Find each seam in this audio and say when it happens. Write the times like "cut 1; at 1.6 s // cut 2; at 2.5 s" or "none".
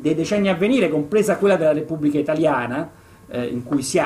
none